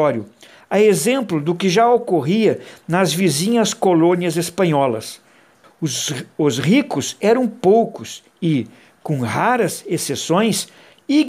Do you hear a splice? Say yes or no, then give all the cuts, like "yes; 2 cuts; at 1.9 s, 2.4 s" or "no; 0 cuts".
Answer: yes; 1 cut; at 5.6 s